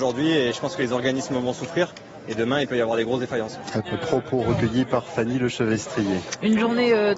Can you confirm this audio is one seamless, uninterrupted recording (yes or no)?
no